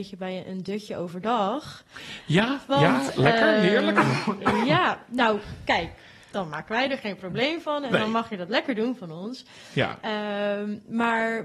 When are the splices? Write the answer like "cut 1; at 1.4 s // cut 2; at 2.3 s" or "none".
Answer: cut 1; at 6.3 s

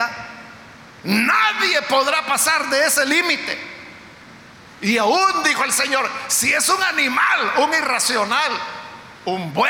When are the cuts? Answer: cut 1; at 4.7 s

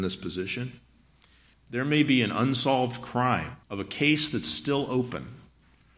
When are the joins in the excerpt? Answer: cut 1; at 1.5 s // cut 2; at 3.6 s

